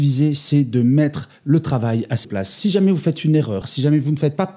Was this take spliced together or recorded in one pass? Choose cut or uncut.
cut